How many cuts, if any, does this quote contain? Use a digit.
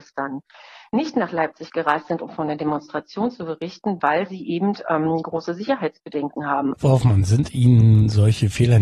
1